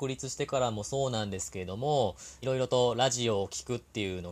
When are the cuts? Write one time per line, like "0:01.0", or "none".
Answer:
0:02.4